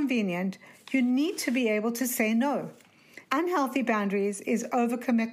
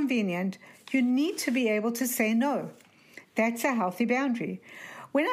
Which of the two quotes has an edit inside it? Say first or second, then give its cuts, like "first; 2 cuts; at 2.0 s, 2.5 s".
first; 1 cut; at 3.3 s